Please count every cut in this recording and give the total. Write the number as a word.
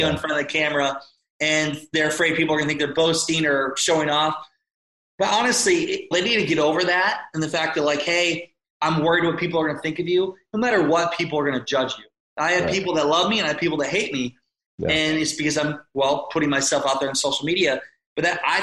one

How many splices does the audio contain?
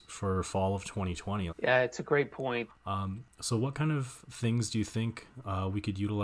two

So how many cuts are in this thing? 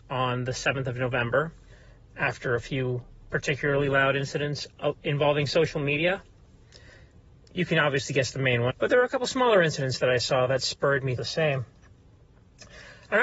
two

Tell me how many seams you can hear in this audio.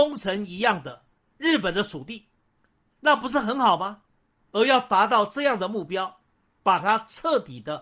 two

